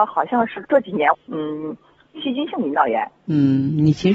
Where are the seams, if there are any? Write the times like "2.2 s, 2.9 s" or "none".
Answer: 1.1 s